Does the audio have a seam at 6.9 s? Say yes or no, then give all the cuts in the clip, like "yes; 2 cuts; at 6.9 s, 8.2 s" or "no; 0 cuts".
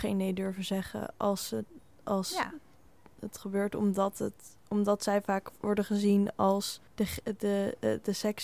yes; 1 cut; at 6.9 s